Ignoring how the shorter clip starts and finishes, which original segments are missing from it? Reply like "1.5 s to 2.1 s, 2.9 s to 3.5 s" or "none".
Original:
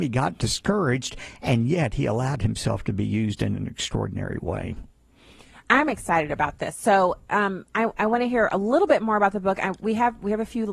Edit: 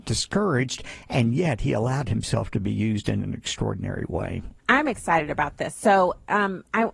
4.9 s to 5.6 s